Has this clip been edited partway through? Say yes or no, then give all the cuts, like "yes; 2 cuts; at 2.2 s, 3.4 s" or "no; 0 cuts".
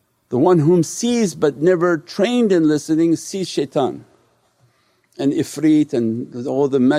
no; 0 cuts